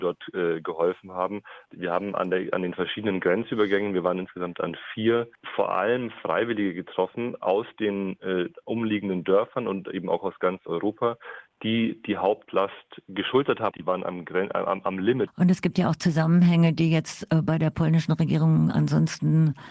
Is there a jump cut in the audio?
yes; 2 cuts; at 13.7 s, 15.3 s

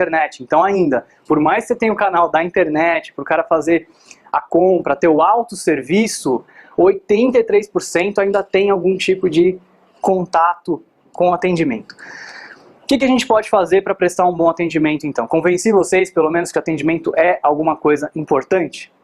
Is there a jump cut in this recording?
no; 0 cuts

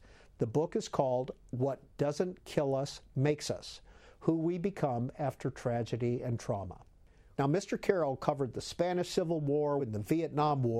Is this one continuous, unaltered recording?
no; 2 cuts; at 7.3 s, 9.8 s

